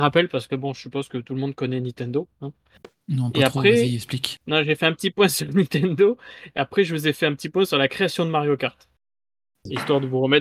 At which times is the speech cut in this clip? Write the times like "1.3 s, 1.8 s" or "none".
4.4 s